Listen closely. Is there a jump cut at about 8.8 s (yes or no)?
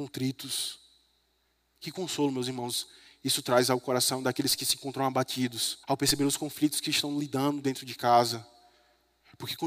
no